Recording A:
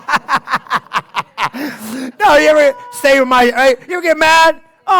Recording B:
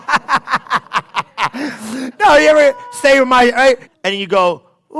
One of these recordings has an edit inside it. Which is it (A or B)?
B